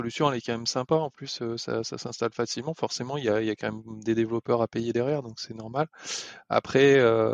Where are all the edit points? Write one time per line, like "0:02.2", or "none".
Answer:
none

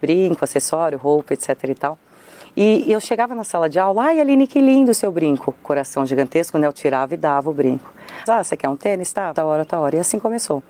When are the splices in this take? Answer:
0:08.3
0:09.3

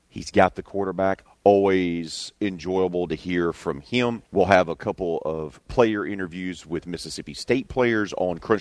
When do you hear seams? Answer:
0:01.3
0:04.3

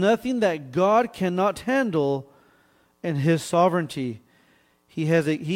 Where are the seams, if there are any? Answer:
none

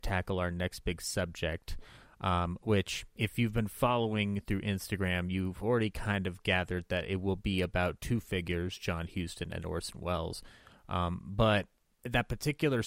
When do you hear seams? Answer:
none

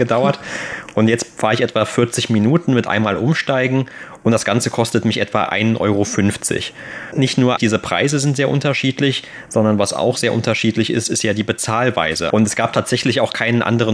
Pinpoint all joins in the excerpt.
0:07.6
0:12.3

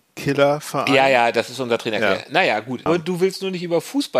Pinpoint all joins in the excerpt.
0:02.9

